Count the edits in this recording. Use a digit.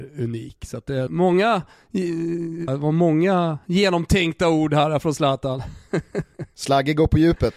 2